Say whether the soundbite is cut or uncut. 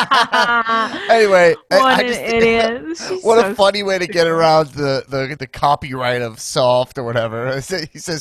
cut